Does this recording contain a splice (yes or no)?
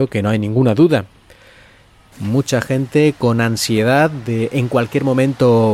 yes